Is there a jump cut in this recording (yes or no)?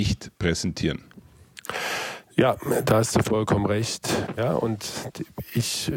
no